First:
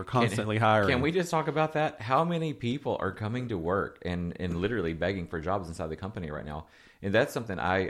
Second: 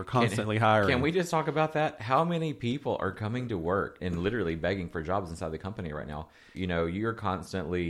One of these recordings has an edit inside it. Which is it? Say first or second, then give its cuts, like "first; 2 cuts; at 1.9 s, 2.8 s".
second; 2 cuts; at 4.0 s, 6.5 s